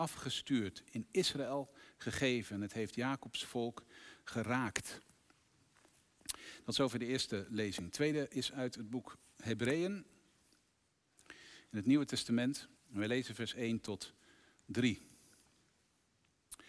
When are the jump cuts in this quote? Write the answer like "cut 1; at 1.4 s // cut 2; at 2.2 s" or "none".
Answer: cut 1; at 12.8 s